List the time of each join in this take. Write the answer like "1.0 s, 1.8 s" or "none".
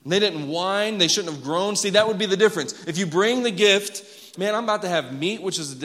4.4 s